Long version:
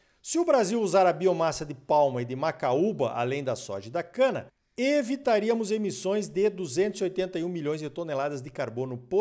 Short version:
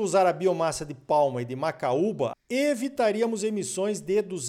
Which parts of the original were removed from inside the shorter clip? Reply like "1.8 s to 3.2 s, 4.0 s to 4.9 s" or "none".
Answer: 3.1 s to 4.6 s

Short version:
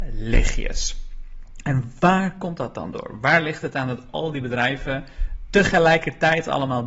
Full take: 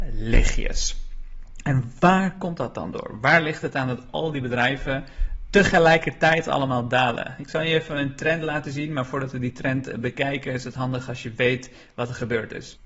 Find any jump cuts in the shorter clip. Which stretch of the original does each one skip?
none

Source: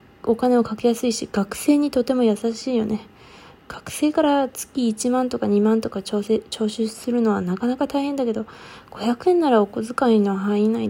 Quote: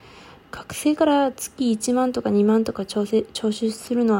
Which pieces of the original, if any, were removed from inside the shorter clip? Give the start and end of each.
none

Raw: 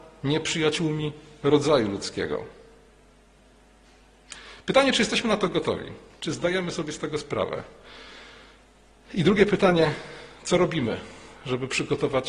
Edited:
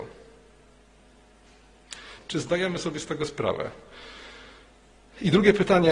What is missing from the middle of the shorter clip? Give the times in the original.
4.6 s to 6.1 s

